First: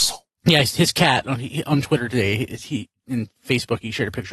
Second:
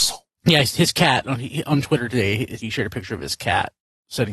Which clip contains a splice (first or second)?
second